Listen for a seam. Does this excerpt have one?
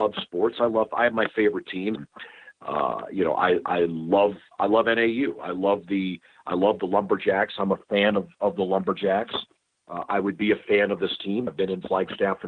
yes; 2 cuts; at 1.9 s, 11.5 s

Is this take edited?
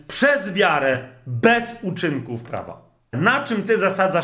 yes; 1 cut; at 3.1 s

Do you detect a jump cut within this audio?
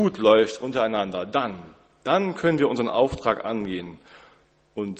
no; 0 cuts

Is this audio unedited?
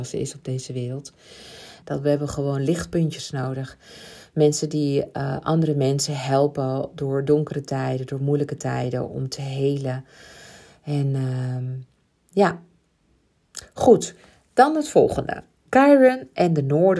no; 1 cut; at 1.8 s

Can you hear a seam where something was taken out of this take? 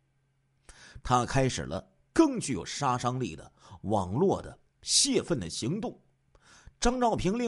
yes; 1 cut; at 1.0 s

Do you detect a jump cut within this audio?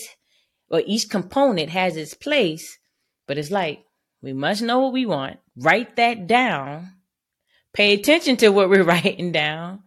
yes; 1 cut; at 5.5 s

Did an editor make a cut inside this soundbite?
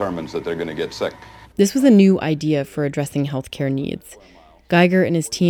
yes; 1 cut; at 1.5 s

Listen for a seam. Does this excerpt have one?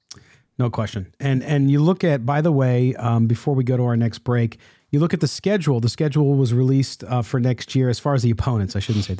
no; 0 cuts

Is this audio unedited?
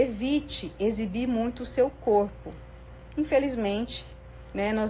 yes; 0 cuts

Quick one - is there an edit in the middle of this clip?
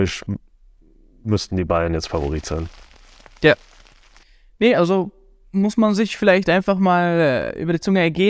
no; 0 cuts

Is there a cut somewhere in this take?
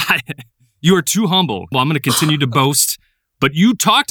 yes; 1 cut; at 1.7 s

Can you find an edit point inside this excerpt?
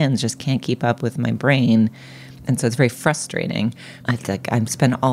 yes; 1 cut; at 4.0 s

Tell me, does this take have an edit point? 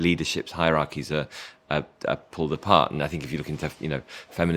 no; 0 cuts

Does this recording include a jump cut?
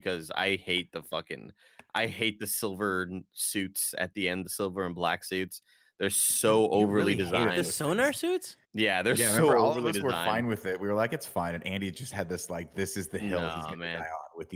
yes; 1 cut; at 8.6 s

